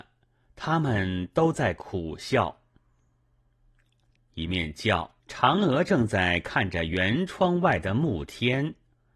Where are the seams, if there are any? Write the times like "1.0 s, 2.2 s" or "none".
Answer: 4.2 s, 5.2 s